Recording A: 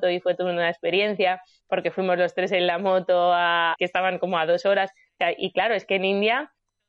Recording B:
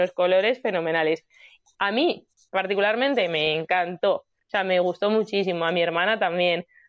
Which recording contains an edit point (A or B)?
A